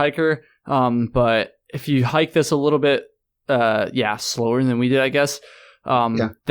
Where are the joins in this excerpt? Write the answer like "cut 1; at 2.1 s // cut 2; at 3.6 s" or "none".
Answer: none